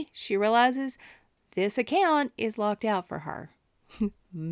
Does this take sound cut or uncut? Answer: uncut